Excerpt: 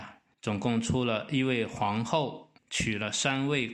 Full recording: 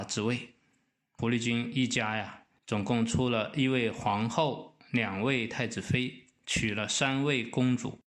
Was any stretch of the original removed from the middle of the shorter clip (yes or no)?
yes